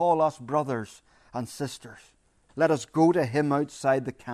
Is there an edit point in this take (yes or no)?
yes